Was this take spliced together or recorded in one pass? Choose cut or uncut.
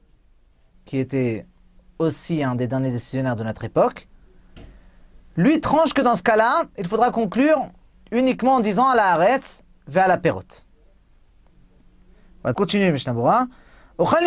cut